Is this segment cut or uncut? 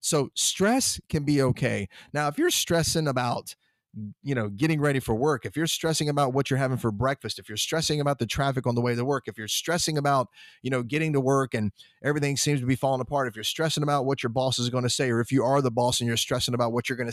uncut